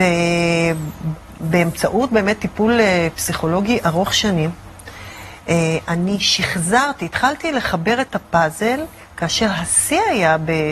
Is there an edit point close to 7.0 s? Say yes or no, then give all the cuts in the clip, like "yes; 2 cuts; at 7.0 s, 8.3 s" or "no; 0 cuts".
no; 0 cuts